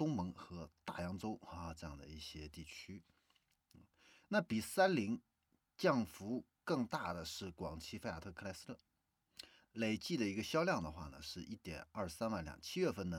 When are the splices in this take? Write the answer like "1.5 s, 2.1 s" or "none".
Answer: 9.6 s